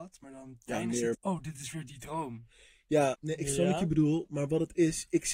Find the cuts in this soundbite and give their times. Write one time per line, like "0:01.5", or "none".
0:01.1
0:03.1

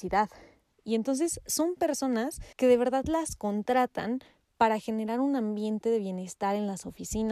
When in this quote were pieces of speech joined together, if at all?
0:02.5

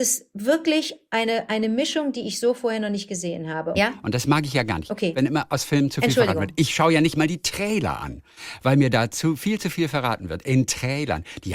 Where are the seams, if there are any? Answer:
0:03.7

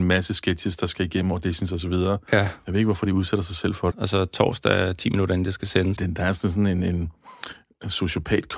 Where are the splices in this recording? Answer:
0:03.9
0:06.0

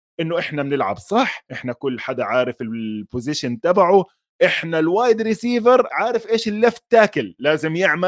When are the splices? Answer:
0:05.9

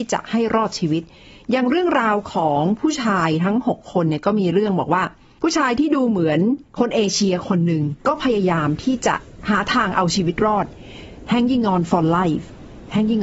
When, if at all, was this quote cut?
0:06.7
0:08.0

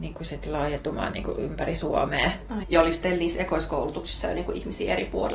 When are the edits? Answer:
0:02.6

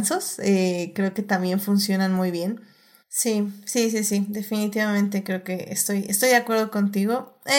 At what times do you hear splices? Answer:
0:03.0

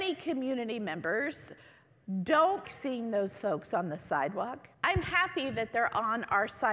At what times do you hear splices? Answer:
0:02.6
0:04.7

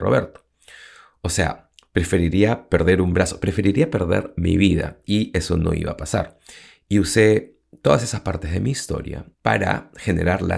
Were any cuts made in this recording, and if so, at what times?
0:09.3

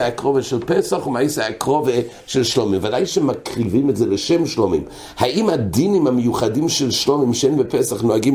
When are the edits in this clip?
none

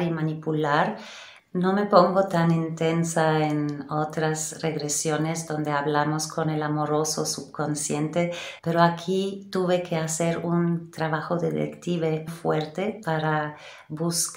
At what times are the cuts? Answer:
0:01.4
0:08.6
0:12.3

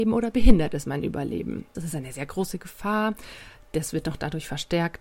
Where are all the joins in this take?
0:01.7

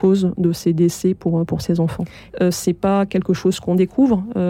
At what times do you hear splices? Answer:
0:02.3

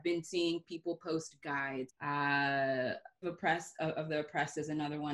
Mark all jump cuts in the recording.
0:01.9
0:03.2

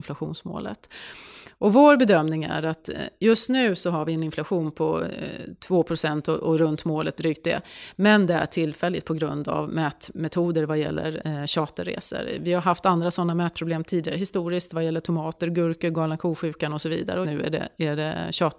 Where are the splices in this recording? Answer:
0:17.2

